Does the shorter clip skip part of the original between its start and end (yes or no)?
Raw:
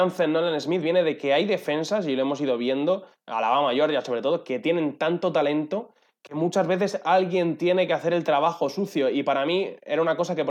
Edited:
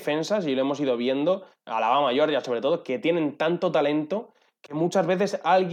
no